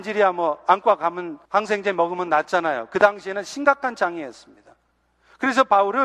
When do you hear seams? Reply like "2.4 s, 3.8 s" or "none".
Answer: 1.5 s